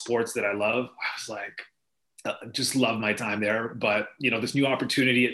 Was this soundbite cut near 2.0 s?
yes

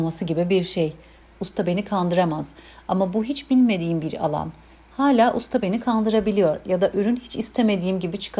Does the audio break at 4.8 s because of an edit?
no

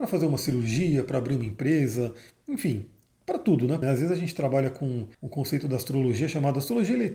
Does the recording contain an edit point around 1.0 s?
no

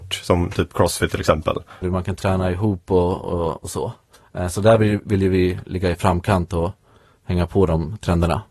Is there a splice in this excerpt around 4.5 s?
no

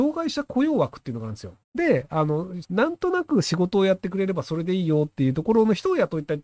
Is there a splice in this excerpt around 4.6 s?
no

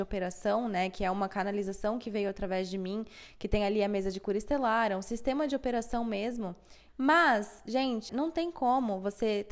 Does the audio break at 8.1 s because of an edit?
yes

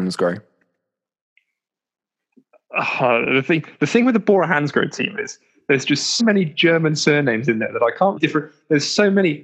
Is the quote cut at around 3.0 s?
no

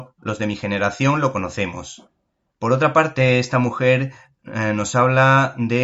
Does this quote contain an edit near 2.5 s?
yes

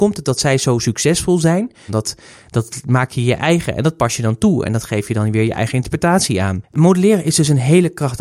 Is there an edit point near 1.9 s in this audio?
yes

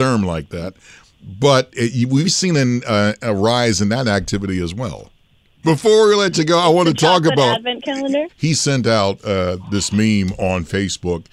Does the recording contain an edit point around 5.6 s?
yes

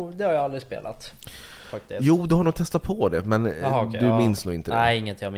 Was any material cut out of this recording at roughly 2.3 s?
no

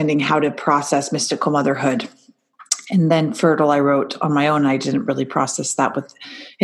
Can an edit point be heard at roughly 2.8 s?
no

